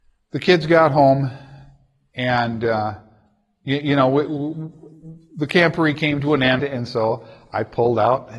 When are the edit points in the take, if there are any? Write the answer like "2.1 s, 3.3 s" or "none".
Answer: 6.6 s